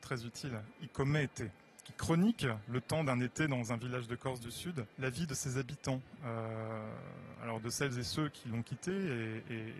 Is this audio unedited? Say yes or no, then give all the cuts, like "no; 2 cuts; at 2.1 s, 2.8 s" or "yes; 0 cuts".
no; 1 cut; at 4.9 s